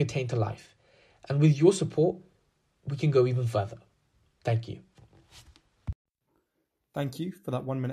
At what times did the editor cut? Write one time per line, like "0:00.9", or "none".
none